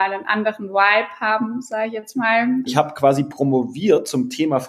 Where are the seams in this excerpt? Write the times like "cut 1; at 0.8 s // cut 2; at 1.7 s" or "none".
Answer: cut 1; at 2.7 s